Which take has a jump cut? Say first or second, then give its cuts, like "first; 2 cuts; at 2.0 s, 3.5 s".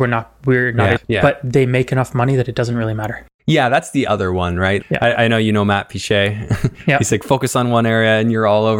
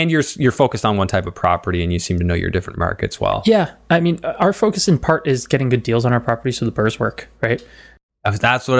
first; 2 cuts; at 1.0 s, 4.8 s